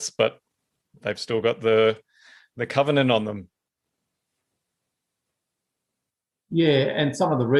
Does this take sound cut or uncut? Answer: uncut